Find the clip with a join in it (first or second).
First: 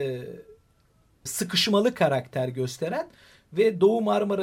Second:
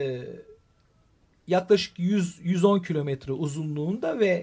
first